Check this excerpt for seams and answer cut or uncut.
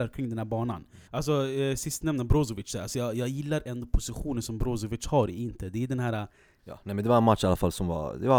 cut